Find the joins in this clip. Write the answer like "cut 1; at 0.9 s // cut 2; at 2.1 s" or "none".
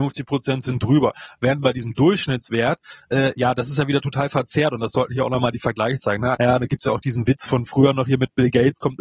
cut 1; at 6.3 s